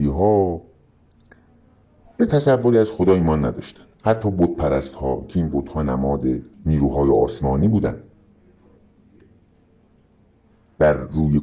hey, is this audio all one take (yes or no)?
no